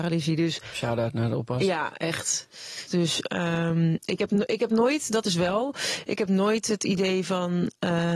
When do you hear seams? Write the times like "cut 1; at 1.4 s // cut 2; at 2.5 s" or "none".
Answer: cut 1; at 2.9 s